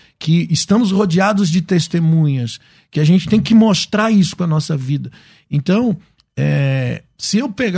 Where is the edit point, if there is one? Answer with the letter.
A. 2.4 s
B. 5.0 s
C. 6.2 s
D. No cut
D